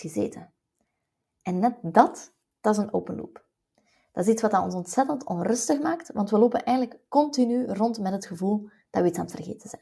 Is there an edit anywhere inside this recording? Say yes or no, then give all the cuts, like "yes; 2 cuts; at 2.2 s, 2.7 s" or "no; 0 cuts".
no; 0 cuts